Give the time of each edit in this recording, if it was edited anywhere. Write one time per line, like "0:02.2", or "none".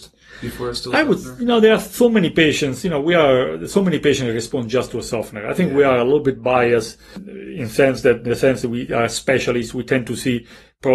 none